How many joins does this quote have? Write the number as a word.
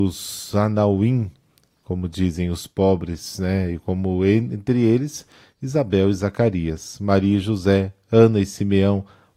zero